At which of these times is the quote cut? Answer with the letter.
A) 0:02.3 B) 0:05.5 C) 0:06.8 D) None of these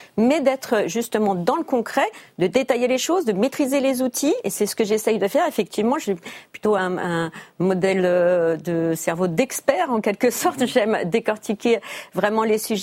D